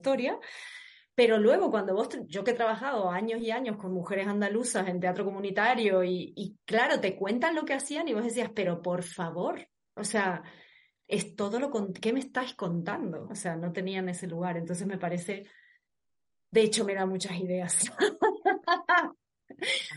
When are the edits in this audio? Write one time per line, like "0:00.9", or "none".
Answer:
0:13.3